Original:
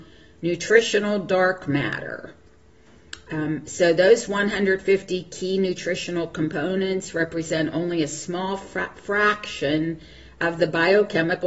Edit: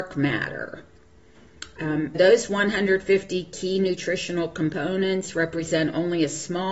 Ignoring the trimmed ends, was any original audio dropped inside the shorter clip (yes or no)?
yes